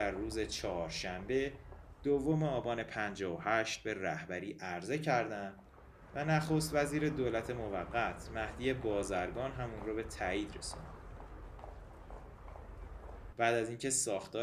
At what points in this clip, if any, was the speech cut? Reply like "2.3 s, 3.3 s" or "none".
13.3 s